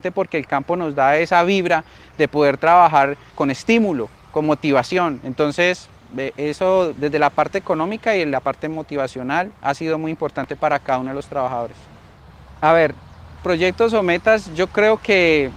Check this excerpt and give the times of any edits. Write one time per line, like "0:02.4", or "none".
0:03.3
0:13.4

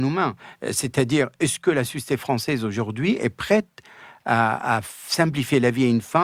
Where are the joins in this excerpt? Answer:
none

